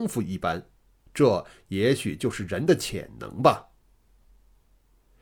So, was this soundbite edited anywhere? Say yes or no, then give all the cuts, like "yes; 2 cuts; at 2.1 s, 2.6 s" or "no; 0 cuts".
no; 0 cuts